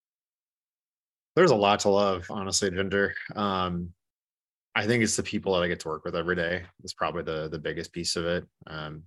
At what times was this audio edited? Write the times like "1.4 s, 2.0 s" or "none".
none